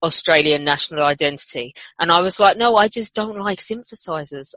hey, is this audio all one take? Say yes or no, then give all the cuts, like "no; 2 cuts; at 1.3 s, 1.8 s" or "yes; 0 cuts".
yes; 0 cuts